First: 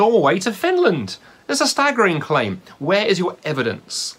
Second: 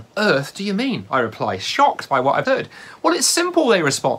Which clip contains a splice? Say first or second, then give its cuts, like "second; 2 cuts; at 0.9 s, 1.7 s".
second; 1 cut; at 2.4 s